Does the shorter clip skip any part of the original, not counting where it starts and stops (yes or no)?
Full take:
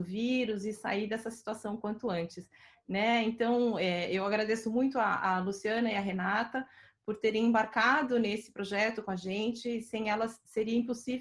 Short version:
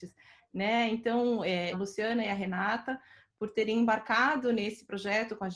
yes